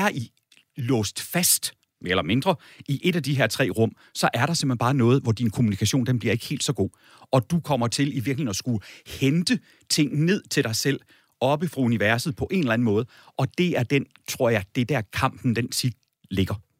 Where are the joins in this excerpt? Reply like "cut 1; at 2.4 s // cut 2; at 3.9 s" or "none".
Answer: none